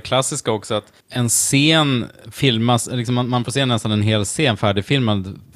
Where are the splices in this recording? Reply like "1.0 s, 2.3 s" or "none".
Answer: 1.0 s